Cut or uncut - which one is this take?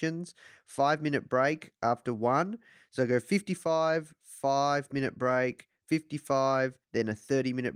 cut